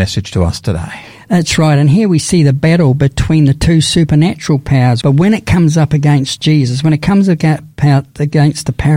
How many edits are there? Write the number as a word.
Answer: one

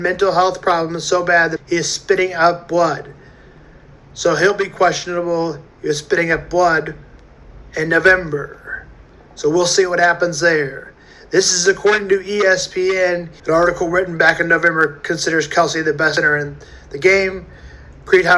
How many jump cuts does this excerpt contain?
two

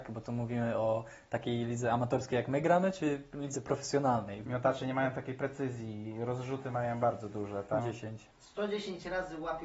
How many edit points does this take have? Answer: two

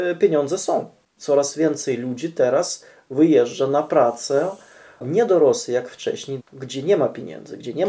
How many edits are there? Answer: two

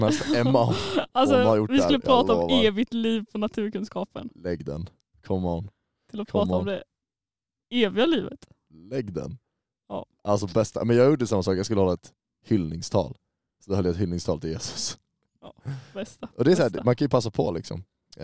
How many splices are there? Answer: one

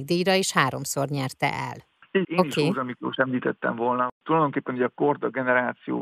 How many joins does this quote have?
one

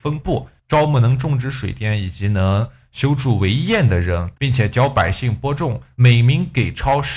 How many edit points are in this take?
two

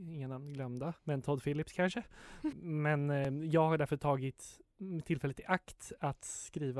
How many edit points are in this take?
two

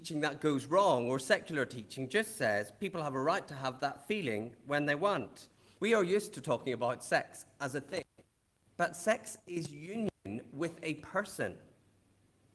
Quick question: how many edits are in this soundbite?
two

